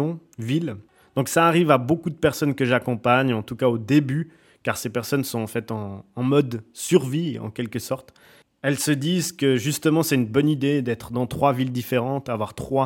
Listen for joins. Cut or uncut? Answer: uncut